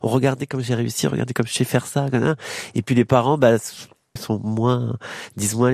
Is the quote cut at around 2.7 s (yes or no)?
no